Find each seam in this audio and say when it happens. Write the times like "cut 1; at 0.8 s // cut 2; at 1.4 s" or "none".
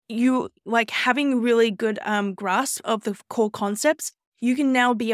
none